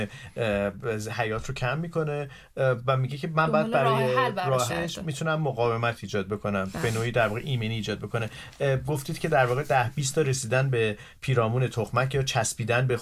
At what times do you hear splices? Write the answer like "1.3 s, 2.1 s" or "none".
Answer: 4.7 s

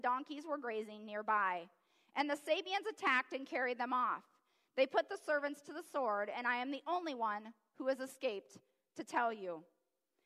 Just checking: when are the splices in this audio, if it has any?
none

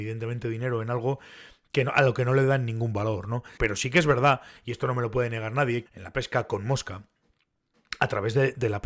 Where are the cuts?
3.6 s, 5.9 s

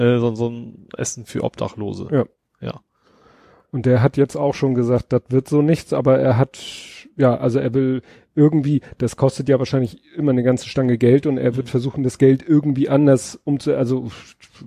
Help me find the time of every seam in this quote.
none

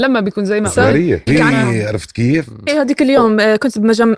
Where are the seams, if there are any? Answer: 1.3 s, 2.7 s

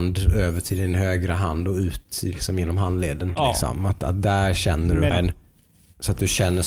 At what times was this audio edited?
3.3 s, 5.1 s

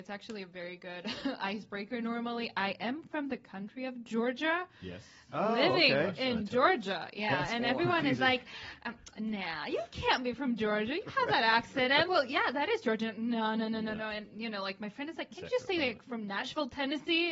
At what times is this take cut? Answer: 12.1 s

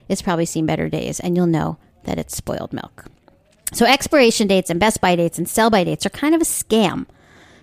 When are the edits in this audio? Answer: none

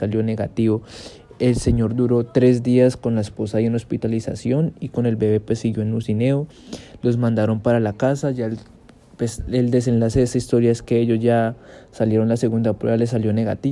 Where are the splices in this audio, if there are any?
none

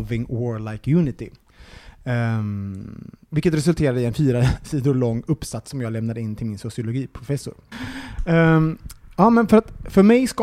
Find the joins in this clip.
7.7 s

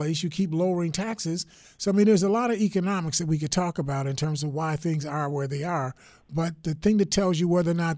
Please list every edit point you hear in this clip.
1.6 s

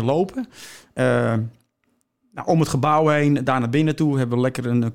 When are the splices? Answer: 3.5 s

